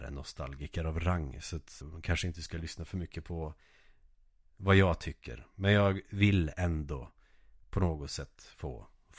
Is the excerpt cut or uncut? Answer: cut